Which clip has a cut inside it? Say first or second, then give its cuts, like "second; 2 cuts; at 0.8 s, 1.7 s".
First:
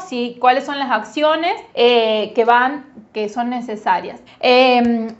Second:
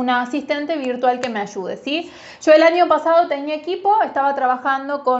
first; 2 cuts; at 1.7 s, 4.3 s